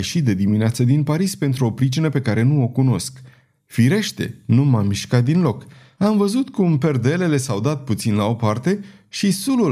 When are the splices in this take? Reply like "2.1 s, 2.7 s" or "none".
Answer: 3.5 s, 6.0 s